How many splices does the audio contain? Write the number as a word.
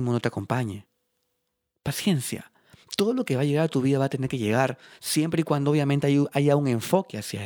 zero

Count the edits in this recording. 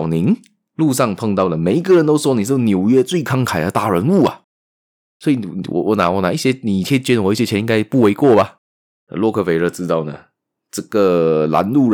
zero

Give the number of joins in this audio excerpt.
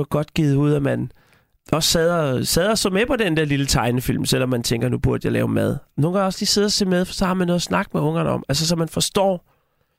one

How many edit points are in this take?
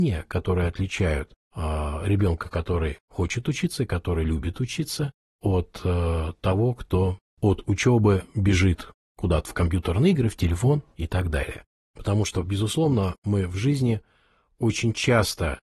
one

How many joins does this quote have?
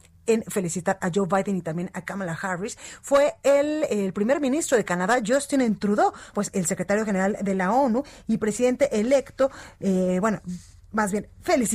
one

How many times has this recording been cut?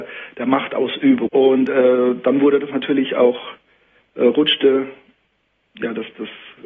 one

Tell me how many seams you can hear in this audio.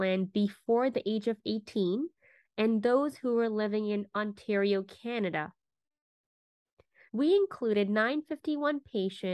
one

